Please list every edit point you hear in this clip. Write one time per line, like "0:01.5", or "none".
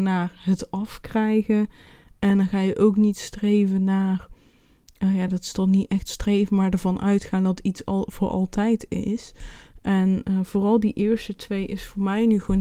none